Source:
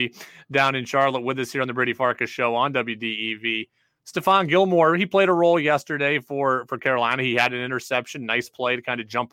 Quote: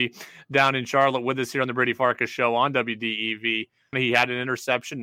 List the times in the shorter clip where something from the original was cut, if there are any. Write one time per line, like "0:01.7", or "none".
0:03.9